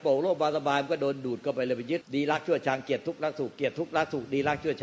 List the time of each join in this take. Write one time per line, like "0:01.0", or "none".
0:02.0